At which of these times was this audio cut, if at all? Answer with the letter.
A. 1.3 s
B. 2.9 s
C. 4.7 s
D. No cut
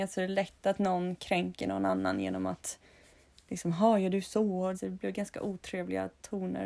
C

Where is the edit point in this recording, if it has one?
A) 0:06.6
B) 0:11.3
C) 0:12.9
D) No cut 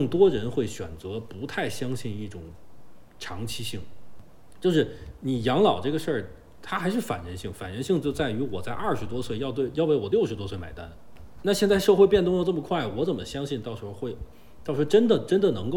D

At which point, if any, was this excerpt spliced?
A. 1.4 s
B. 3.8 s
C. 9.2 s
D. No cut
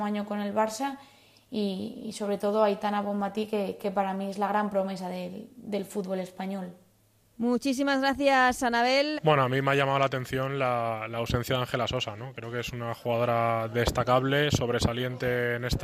C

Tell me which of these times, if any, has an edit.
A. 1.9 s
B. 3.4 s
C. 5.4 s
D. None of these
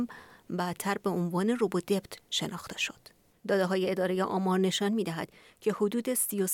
B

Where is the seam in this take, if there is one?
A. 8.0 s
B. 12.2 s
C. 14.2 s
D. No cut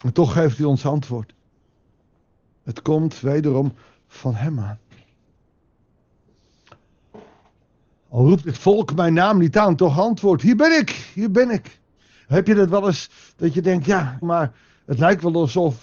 C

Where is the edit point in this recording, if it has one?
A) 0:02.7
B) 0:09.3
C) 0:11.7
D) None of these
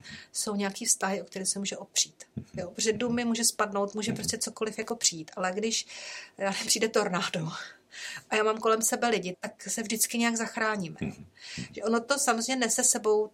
B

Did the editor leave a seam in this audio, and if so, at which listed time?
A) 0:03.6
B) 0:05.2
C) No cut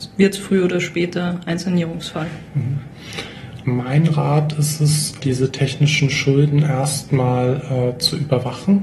C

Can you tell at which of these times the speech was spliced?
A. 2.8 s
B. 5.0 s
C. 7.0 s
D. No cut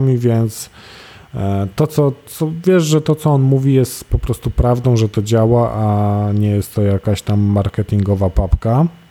D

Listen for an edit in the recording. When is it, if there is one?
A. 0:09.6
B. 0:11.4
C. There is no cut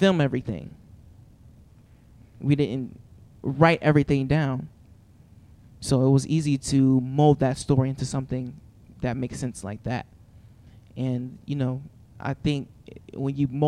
C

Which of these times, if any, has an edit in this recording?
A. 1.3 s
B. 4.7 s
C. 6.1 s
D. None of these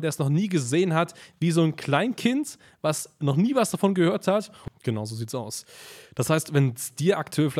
B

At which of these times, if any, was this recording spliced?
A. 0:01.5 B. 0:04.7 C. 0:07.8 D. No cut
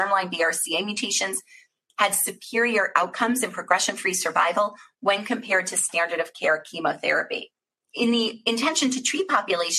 C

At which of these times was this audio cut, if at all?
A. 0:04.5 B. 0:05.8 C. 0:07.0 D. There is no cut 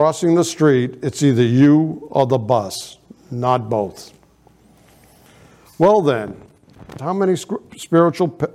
C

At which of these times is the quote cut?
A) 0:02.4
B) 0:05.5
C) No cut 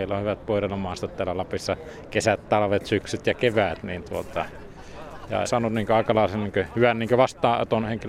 B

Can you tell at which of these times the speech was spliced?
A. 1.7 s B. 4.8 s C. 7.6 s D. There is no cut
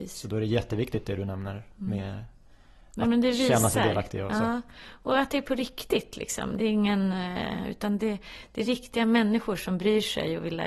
D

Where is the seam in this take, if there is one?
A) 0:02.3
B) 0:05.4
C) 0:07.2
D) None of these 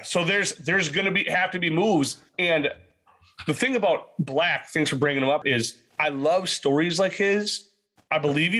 B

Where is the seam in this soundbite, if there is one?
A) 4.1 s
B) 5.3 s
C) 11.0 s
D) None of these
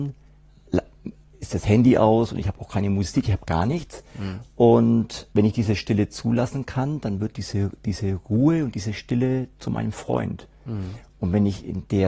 B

